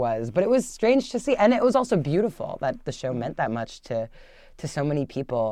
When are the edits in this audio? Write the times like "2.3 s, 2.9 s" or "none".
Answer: none